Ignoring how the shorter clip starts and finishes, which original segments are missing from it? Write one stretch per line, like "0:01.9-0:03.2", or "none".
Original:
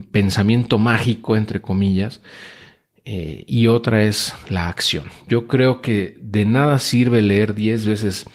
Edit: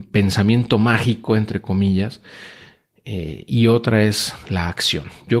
none